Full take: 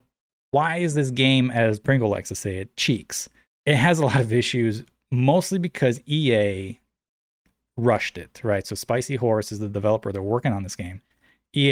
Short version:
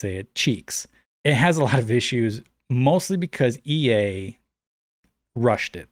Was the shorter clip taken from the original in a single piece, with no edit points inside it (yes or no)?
yes